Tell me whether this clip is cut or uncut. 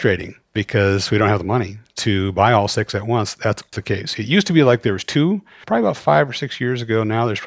cut